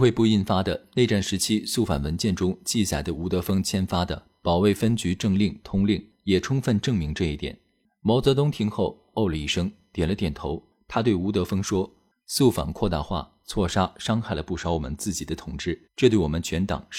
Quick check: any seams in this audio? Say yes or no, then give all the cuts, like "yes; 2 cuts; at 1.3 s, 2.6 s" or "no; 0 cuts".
yes; 1 cut; at 15.8 s